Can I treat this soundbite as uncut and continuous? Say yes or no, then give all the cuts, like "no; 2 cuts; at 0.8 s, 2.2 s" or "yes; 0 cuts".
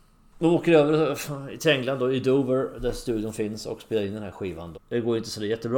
no; 1 cut; at 4.7 s